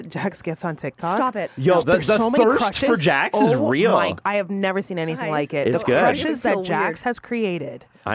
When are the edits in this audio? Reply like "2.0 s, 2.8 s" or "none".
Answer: none